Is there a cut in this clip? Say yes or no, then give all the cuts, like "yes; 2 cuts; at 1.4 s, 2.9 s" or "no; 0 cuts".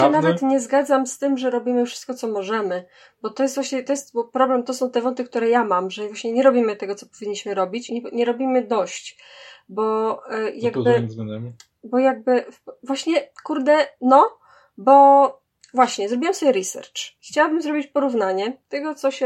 no; 0 cuts